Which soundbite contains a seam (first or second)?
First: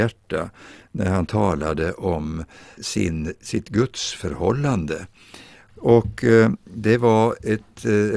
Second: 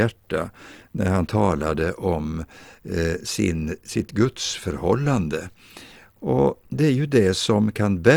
first